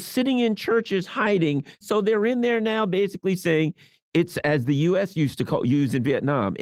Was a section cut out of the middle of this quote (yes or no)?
yes